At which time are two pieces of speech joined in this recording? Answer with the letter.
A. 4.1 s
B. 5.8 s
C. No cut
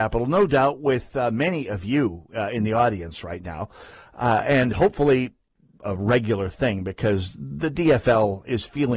B